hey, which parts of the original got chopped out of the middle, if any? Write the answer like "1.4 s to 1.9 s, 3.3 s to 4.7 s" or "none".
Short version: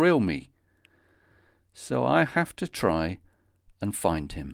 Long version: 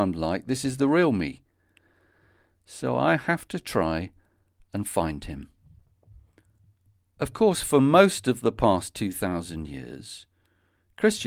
none